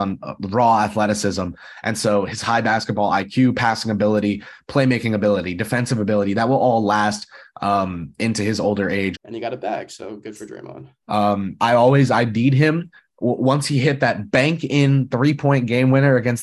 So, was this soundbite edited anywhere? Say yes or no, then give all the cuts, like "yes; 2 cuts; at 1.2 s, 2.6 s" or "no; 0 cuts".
yes; 2 cuts; at 9.1 s, 11.0 s